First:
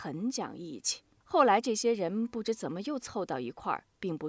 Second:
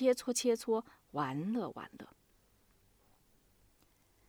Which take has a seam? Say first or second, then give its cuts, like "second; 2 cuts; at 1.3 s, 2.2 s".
first; 1 cut; at 1.2 s